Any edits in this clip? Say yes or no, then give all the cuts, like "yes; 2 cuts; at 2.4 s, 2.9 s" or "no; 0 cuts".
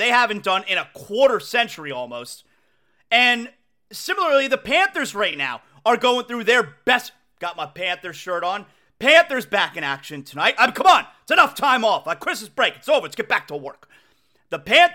no; 0 cuts